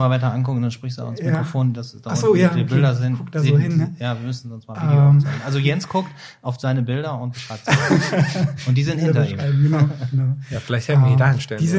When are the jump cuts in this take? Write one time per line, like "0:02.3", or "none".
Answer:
none